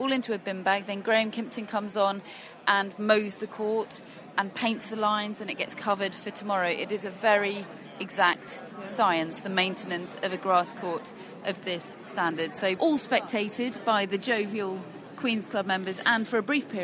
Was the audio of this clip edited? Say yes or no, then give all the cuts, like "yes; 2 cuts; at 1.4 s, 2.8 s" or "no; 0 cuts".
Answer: yes; 1 cut; at 12.8 s